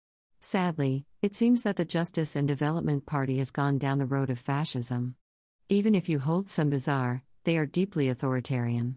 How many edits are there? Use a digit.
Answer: 2